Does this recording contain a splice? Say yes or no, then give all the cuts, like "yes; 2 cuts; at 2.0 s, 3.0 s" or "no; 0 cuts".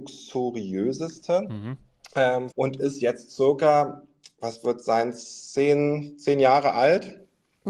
yes; 1 cut; at 2.5 s